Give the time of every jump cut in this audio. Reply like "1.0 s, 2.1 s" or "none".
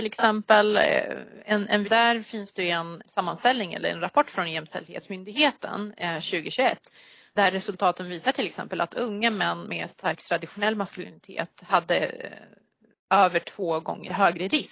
1.8 s